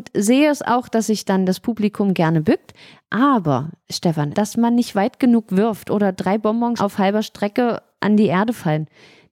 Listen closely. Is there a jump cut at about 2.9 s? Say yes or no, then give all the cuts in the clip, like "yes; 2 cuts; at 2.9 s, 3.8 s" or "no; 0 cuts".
no; 2 cuts; at 4.3 s, 6.8 s